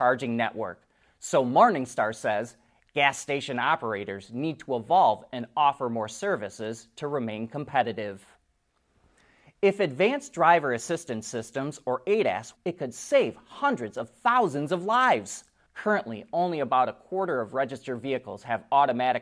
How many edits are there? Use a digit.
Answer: 2